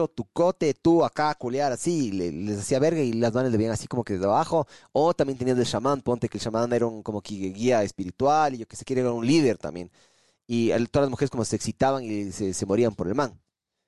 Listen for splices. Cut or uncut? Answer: uncut